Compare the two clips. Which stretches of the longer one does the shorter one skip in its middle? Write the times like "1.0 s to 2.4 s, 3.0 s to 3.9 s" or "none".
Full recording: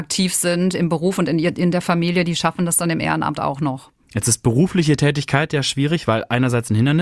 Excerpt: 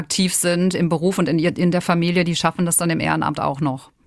none